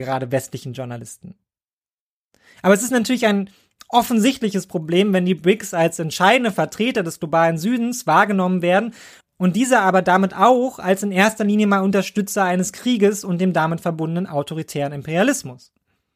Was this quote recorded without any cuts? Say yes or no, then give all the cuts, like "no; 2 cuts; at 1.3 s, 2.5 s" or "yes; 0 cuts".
yes; 0 cuts